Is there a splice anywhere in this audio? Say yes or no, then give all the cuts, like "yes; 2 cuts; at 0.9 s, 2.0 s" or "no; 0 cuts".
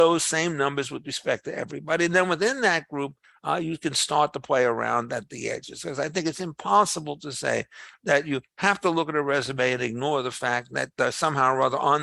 no; 0 cuts